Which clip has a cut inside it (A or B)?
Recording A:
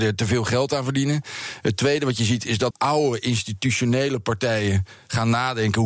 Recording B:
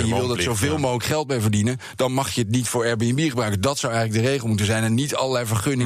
A